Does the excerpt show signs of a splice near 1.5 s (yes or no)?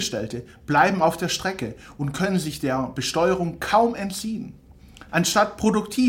no